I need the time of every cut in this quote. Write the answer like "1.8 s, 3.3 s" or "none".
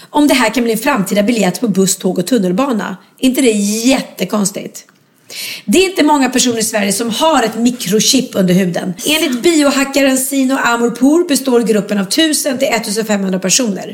9.0 s